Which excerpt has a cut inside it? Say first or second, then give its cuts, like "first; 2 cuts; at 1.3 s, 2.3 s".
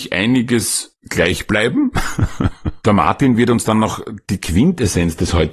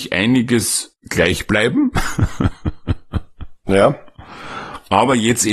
first; 1 cut; at 2.8 s